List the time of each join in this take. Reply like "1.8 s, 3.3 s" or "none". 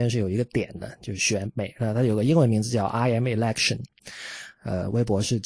4.5 s